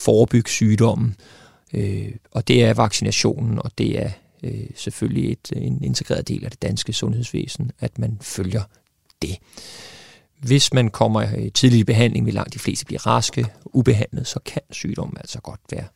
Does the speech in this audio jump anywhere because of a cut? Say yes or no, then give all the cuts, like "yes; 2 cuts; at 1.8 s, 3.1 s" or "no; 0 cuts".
no; 0 cuts